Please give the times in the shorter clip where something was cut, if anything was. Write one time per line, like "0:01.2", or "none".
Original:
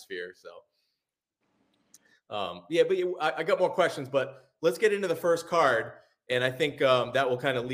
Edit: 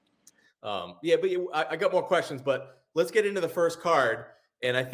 none